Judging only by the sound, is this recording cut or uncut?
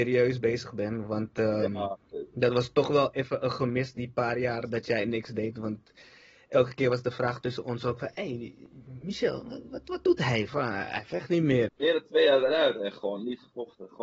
cut